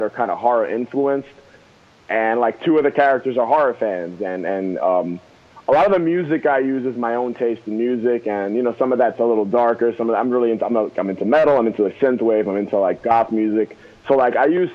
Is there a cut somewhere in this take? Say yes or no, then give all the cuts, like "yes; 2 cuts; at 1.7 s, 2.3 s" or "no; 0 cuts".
no; 0 cuts